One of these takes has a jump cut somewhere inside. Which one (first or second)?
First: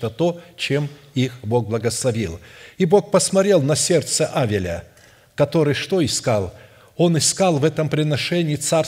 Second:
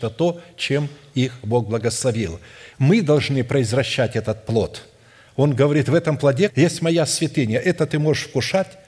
second